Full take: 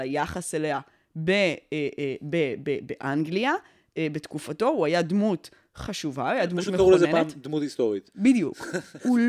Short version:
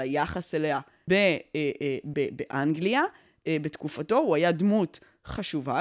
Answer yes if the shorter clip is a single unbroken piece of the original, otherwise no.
no